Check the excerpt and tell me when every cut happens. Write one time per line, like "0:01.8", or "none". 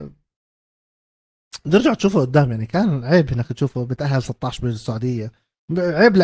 none